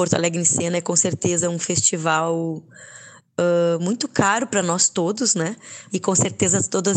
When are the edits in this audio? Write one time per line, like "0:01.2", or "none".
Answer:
0:05.9